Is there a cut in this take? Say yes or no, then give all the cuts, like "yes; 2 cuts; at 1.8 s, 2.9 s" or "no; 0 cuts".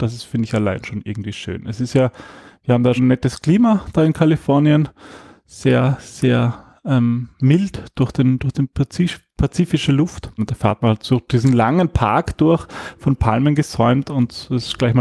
yes; 2 cuts; at 3.0 s, 10.4 s